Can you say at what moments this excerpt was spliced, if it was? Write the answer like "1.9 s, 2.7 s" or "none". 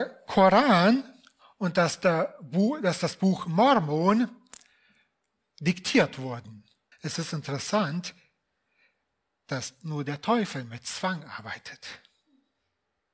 6.9 s